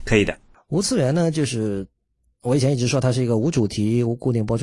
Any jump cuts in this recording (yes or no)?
no